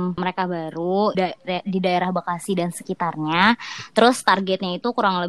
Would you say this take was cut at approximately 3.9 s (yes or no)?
no